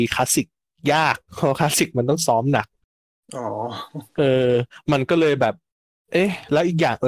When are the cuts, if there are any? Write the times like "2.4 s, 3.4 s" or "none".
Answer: none

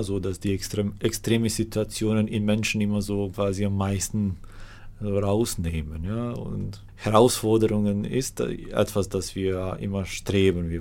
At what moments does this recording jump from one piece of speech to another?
none

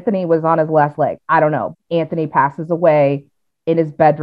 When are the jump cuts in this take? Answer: 1.7 s

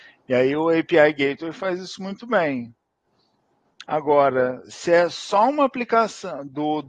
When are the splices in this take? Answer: none

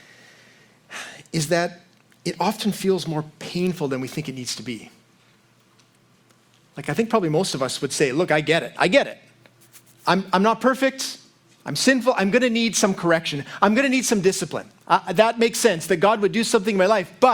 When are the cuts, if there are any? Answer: none

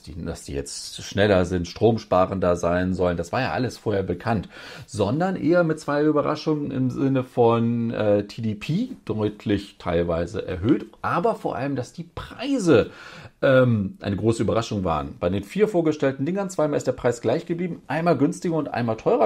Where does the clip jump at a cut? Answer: none

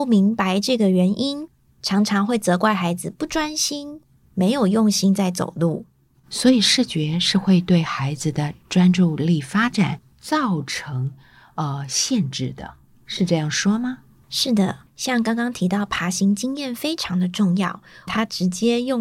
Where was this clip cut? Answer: 14.9 s, 18.1 s

